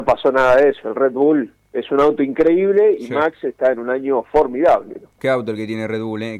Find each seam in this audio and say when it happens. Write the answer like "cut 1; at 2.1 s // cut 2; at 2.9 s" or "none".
cut 1; at 5.2 s